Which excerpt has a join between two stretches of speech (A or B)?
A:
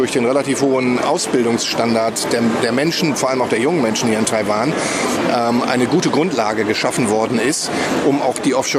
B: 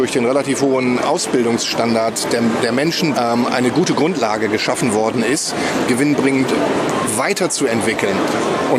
B